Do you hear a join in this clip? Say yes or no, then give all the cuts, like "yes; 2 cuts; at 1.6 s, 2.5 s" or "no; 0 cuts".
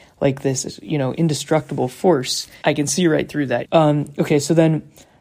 yes; 2 cuts; at 2.6 s, 3.6 s